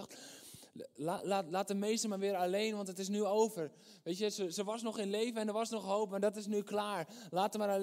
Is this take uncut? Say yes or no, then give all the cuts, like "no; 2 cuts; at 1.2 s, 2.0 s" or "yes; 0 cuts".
yes; 0 cuts